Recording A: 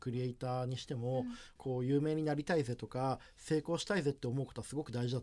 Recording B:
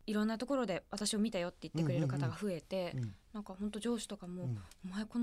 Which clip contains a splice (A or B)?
A